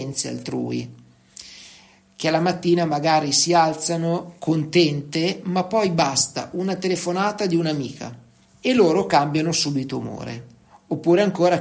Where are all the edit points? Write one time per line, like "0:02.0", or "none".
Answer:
0:08.5